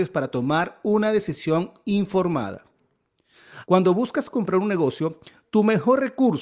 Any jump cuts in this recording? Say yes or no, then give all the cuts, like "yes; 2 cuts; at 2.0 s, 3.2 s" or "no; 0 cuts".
yes; 1 cut; at 3.6 s